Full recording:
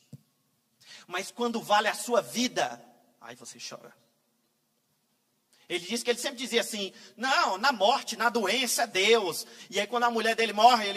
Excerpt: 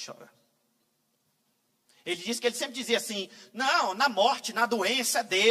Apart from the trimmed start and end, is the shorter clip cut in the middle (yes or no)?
no